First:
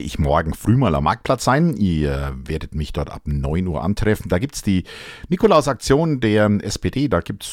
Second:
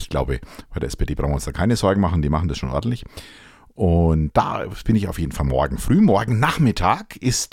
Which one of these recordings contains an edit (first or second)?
second